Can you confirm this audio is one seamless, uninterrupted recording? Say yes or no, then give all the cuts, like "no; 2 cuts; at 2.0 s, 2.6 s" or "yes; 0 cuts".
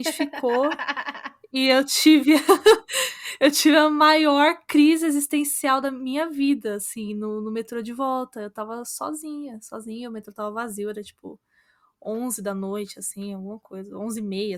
yes; 0 cuts